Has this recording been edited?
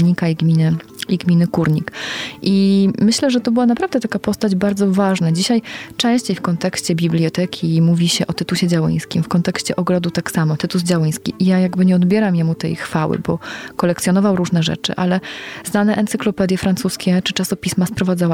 no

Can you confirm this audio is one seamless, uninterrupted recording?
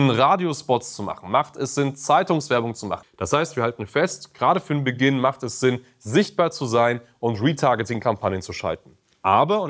no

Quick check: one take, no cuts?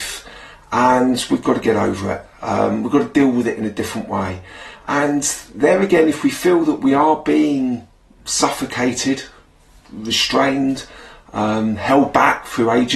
yes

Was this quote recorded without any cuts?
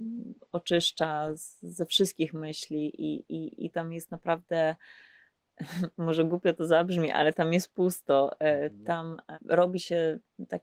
yes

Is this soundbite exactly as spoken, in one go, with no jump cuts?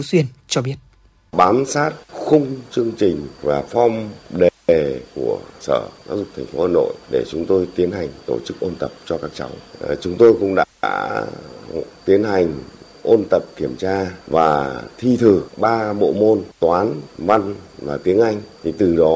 yes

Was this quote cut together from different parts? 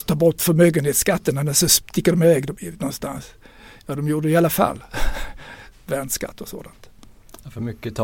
yes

